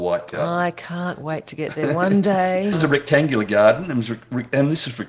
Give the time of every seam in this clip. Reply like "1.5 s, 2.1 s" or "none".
2.7 s

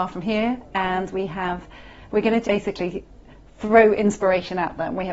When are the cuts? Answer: 2.4 s

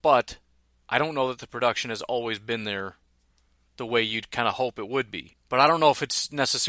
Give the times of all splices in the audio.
5.3 s

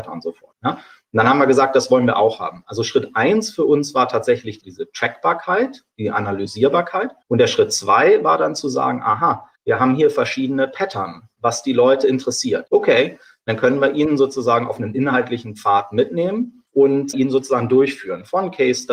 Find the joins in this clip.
12.7 s

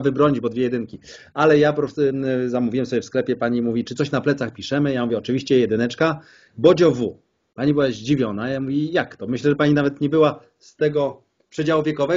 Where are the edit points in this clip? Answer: none

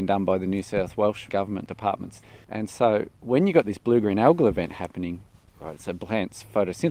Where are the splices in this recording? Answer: 2.4 s, 5.5 s

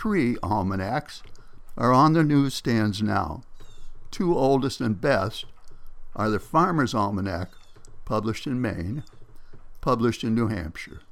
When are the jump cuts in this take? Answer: 9.8 s

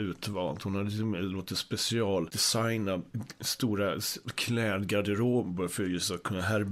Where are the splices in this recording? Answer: none

